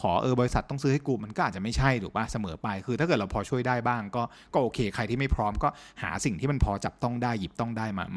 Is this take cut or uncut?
uncut